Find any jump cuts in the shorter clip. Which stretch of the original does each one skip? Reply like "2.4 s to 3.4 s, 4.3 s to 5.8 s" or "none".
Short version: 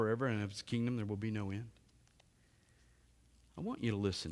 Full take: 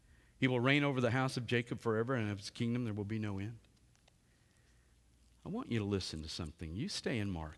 none